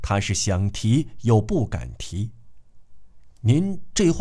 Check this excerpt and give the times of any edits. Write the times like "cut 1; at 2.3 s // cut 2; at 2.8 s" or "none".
none